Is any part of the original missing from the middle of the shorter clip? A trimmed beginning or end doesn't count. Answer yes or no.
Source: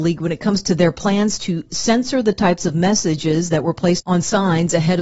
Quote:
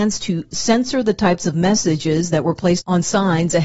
no